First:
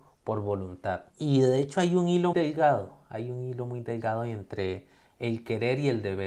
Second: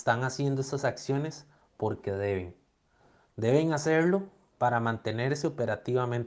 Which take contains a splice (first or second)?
first